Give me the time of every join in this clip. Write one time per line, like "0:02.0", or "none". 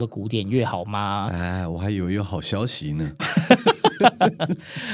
0:03.2